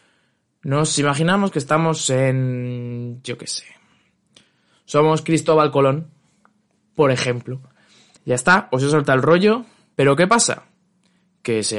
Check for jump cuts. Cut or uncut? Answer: cut